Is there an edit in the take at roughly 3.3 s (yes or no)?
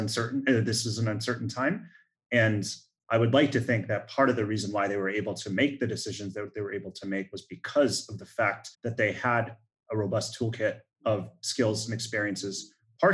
no